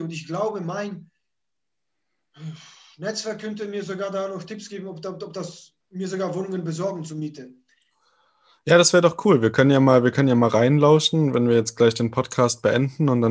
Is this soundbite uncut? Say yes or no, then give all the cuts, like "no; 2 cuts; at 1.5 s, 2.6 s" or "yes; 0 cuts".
no; 1 cut; at 5.8 s